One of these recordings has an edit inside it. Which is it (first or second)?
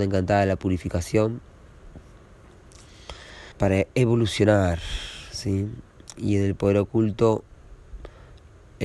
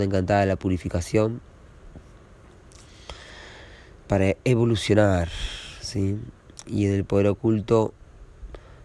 first